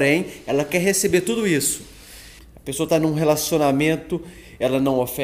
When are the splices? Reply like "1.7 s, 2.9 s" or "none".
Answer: 2.4 s